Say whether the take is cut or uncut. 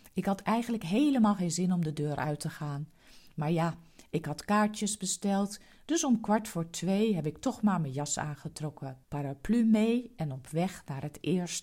cut